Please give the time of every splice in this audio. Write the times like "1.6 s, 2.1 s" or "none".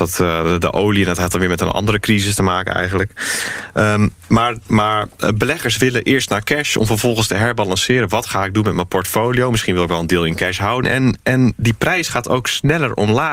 10.8 s